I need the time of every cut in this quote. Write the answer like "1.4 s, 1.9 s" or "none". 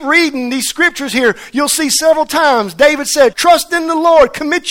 3.3 s